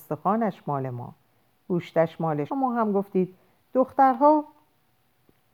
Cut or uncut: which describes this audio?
cut